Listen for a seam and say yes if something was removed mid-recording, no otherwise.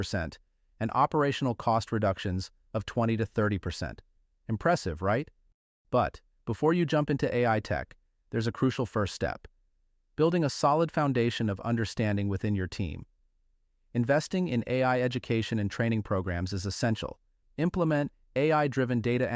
yes